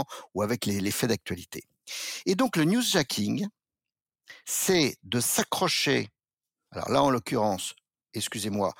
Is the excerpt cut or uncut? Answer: uncut